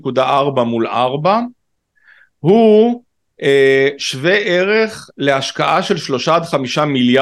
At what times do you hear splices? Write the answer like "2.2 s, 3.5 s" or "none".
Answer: none